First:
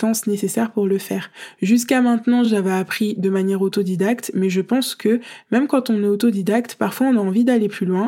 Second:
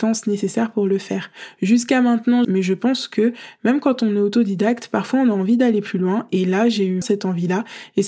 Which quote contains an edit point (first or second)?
second